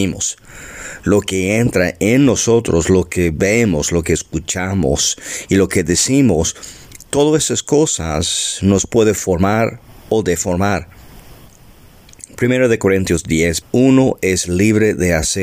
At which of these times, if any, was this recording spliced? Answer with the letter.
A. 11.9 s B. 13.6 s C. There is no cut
B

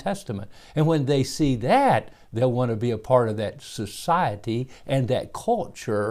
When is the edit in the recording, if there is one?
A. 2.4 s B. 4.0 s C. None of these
C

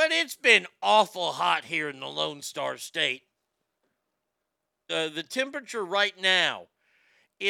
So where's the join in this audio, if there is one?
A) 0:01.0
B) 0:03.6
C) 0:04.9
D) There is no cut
C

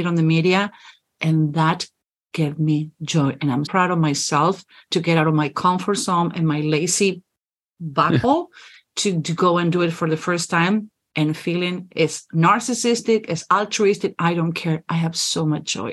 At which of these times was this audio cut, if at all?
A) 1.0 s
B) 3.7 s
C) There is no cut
B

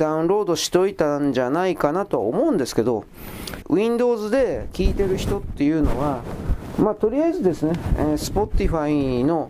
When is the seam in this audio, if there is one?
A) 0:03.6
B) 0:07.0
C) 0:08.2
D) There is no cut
A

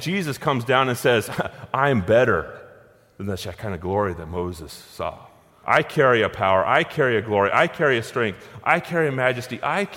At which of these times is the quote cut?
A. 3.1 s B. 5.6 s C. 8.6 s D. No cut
B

